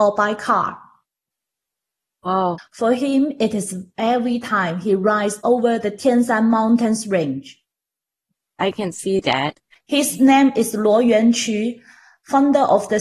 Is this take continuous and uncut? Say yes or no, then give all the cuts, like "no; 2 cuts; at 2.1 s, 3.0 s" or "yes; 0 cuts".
no; 2 cuts; at 2.6 s, 9.8 s